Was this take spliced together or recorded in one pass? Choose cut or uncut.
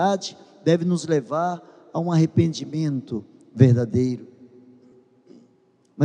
uncut